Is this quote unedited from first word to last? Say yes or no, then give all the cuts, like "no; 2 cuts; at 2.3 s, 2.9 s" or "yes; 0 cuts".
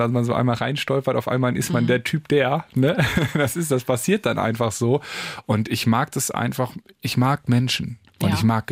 yes; 0 cuts